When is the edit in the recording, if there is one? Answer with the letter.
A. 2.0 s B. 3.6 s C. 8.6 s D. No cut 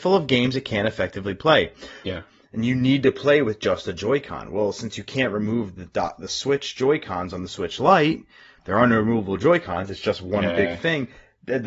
A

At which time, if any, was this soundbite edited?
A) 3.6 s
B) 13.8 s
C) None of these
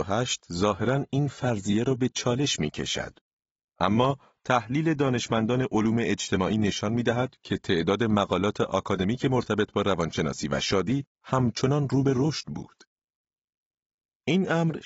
A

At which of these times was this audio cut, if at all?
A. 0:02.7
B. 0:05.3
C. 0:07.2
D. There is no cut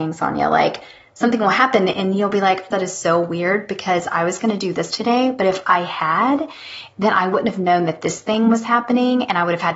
A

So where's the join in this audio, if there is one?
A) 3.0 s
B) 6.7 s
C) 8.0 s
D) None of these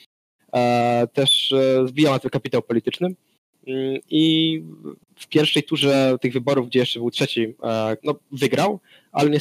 C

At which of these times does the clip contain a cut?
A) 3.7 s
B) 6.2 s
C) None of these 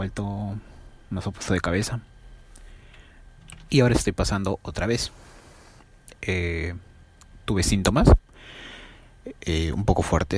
A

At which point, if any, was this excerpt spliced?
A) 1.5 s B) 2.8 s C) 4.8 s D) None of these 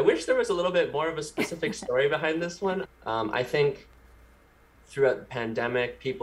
B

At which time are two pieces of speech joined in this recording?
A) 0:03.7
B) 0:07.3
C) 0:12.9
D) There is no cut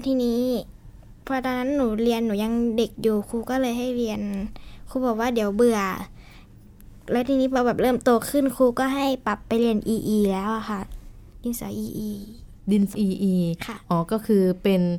C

